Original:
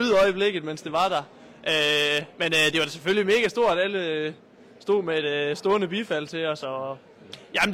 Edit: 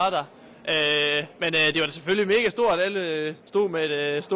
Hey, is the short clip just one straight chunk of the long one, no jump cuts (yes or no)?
no